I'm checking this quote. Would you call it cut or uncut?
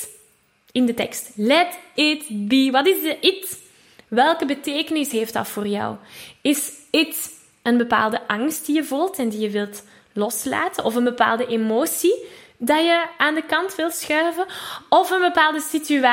uncut